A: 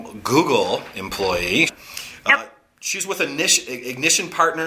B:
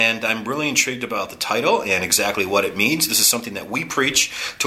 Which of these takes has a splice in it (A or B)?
A